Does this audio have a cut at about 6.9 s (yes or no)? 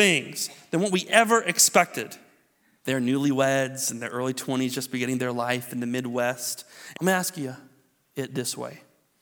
yes